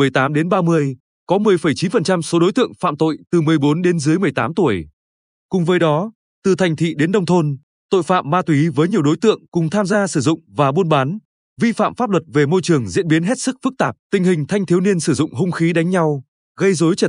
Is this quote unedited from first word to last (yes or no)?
no